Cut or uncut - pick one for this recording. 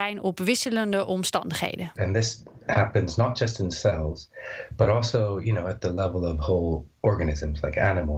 cut